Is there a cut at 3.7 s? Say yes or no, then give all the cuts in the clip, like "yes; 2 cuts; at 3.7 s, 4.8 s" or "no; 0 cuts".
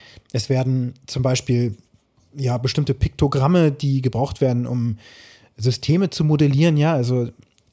no; 0 cuts